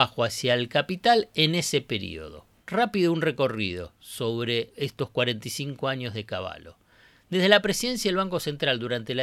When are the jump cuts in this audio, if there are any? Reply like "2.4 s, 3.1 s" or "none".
none